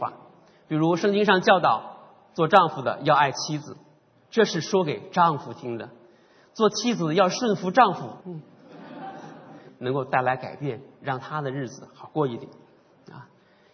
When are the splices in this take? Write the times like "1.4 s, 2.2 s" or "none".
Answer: 8.2 s, 9.7 s